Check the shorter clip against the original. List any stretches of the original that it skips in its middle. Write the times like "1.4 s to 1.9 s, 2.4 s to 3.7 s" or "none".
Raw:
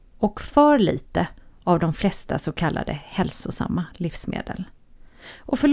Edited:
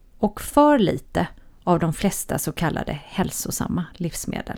none